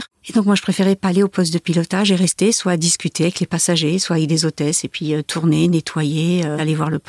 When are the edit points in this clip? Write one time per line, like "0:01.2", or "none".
none